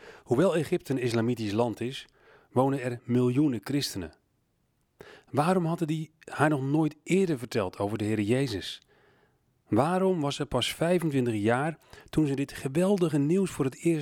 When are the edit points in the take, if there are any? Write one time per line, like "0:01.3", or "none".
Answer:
none